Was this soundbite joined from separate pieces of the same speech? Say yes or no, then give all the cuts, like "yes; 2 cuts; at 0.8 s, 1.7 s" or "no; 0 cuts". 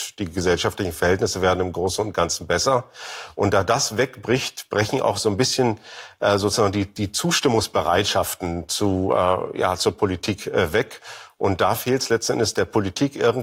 no; 0 cuts